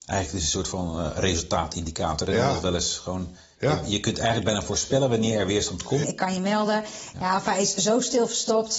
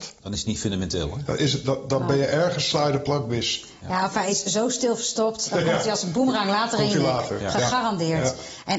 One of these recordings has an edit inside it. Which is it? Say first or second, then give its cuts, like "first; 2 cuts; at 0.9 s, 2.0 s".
first; 2 cuts; at 6.0 s, 7.1 s